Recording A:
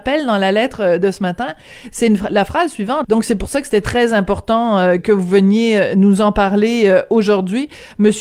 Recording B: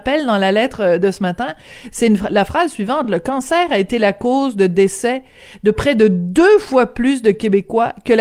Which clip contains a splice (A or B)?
A